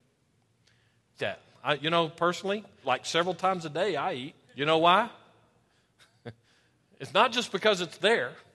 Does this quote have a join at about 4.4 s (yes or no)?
yes